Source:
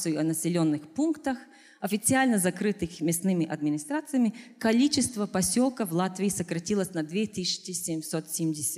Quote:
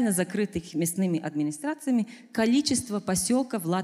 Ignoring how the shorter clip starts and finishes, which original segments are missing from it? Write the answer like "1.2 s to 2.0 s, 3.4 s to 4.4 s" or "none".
none